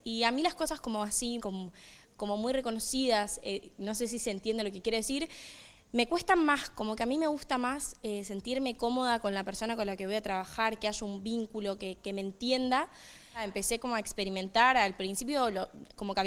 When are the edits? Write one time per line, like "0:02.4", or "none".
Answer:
0:01.4

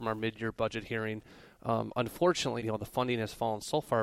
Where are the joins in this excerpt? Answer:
0:01.5
0:02.6

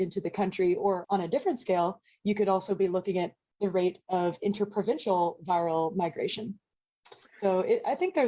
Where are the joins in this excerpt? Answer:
0:01.0

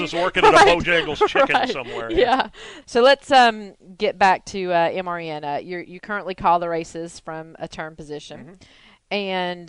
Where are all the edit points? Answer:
0:02.8

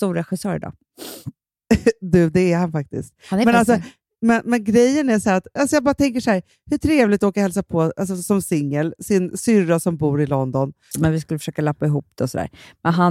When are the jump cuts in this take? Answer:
0:05.6
0:10.9

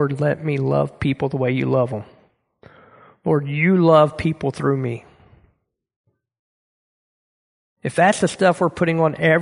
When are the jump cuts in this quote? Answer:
none

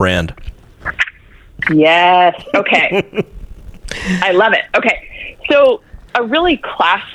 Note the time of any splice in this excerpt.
0:06.1

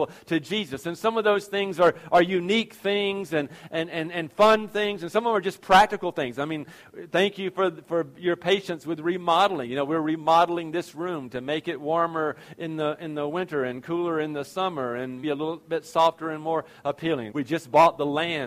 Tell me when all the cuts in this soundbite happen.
0:15.2
0:17.3

